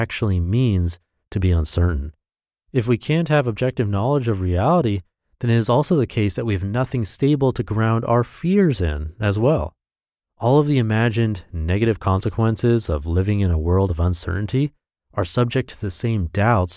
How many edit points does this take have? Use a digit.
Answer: 1